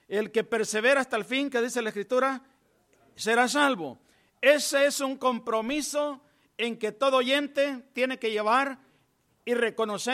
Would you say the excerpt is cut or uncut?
uncut